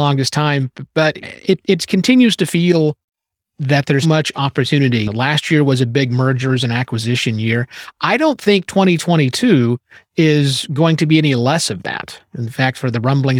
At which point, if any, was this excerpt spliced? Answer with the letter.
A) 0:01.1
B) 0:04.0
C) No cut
B